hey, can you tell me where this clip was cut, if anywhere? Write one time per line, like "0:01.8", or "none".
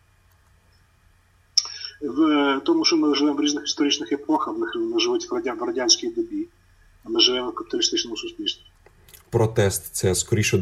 none

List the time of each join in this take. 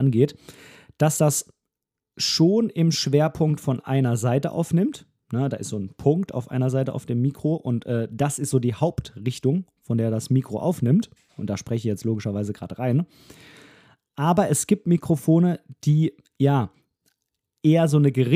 none

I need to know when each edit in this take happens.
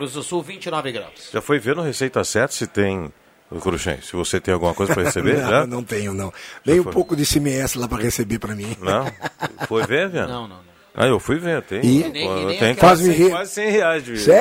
none

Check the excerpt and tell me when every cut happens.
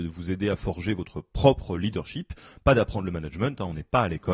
none

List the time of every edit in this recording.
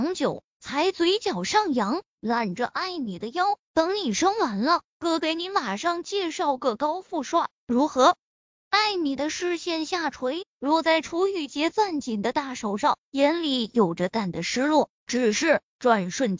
0:14.1

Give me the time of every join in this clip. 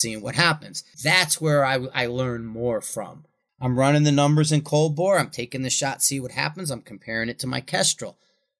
0:00.9
0:03.5

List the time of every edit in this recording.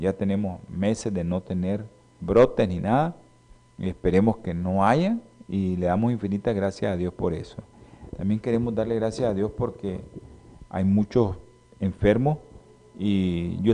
0:02.2

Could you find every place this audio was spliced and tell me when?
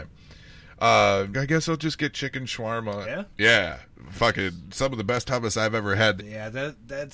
0:01.3
0:03.0
0:06.2

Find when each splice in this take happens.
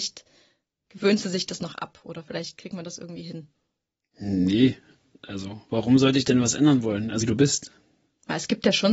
0:07.2

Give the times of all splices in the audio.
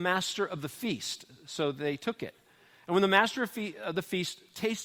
none

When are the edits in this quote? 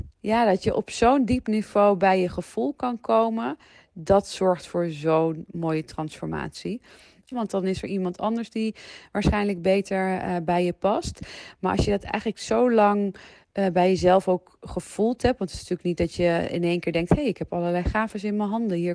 0:07.3

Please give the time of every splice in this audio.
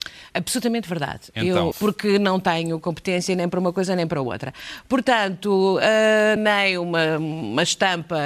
0:01.7
0:06.4

